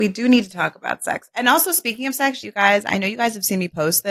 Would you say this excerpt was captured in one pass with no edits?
no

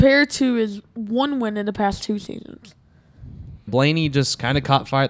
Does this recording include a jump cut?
yes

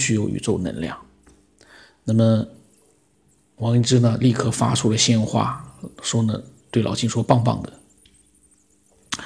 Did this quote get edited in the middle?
no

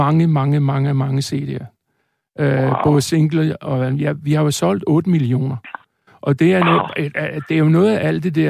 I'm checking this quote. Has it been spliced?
no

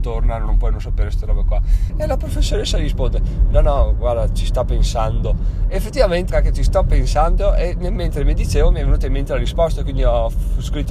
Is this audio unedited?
no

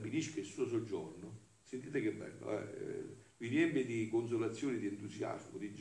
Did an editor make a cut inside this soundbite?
no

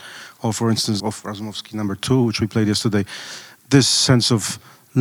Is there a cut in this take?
yes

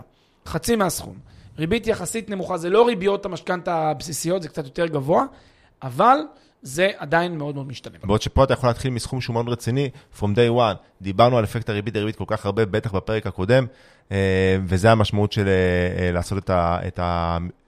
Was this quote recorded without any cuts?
no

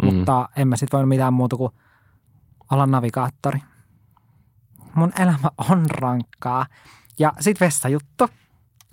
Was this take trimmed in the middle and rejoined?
yes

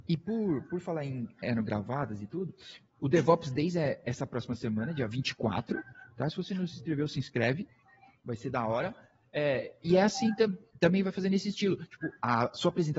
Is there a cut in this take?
no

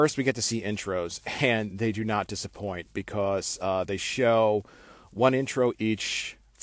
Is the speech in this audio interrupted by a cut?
no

